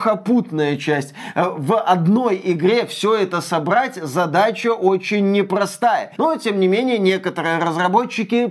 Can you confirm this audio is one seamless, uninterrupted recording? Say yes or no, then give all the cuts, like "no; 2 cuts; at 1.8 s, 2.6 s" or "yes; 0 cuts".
no; 1 cut; at 6.2 s